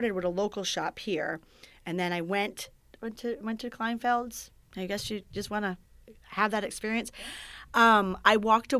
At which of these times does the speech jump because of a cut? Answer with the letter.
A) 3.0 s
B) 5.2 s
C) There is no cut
A